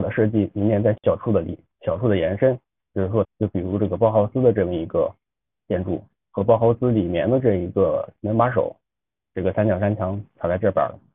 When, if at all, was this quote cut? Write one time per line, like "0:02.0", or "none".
0:03.2
0:09.3